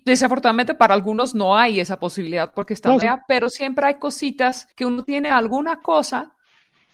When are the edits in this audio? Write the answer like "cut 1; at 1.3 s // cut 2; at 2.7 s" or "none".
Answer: cut 1; at 3.0 s // cut 2; at 4.7 s